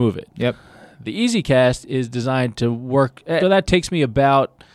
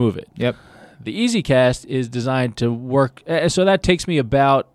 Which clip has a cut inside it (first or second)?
first